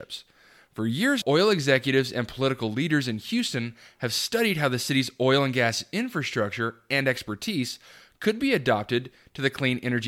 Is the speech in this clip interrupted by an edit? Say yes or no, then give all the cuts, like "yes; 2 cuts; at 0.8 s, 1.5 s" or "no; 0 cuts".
yes; 1 cut; at 1.2 s